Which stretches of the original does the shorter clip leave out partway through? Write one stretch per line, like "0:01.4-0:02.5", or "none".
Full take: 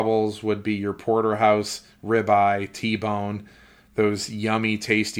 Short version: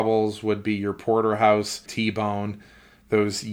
0:01.9-0:02.7